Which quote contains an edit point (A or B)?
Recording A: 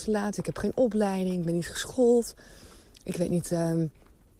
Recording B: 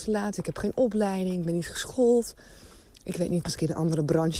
B